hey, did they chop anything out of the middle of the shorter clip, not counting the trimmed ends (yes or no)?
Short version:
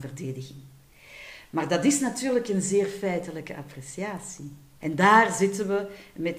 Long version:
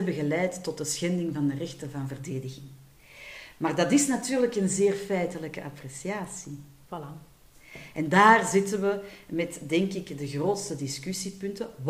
yes